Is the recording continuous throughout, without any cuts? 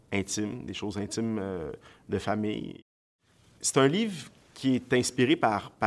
yes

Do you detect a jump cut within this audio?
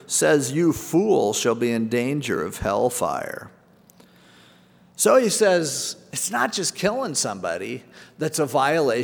no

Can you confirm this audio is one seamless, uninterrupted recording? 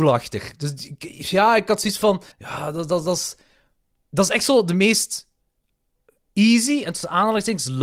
no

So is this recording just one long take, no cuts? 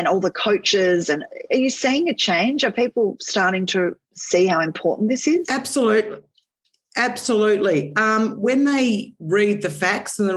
no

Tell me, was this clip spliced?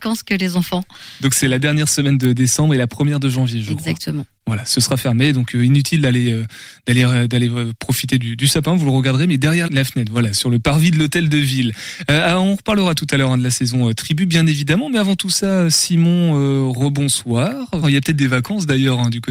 yes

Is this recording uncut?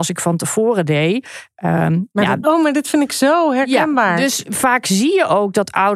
no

